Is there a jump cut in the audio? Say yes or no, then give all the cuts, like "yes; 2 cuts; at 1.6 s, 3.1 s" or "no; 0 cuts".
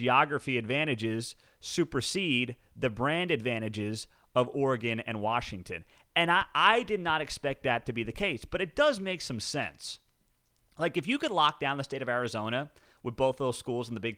no; 0 cuts